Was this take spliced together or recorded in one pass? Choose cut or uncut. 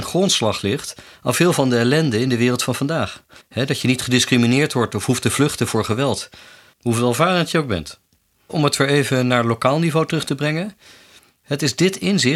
cut